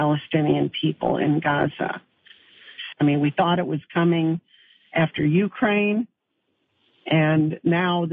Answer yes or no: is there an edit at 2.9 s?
yes